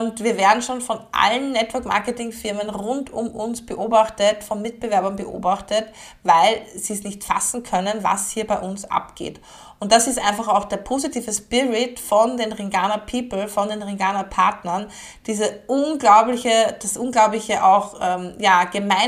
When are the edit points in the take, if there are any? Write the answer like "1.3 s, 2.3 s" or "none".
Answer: none